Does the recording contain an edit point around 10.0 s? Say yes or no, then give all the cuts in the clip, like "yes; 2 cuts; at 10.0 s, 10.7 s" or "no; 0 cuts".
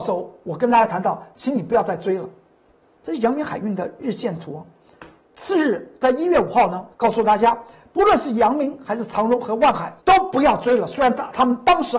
yes; 2 cuts; at 6.9 s, 10.0 s